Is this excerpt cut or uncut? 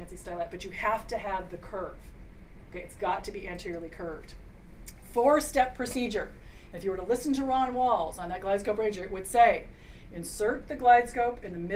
uncut